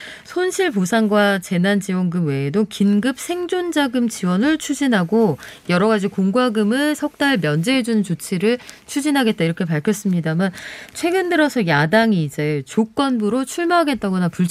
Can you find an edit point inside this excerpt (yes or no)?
no